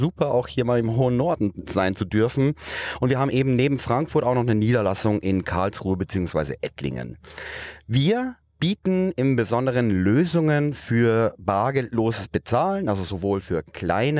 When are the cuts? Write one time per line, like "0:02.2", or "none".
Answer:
none